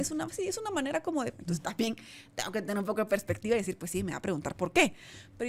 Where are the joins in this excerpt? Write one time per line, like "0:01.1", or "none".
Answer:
0:01.3